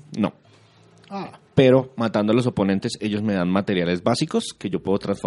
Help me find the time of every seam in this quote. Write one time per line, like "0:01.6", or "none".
none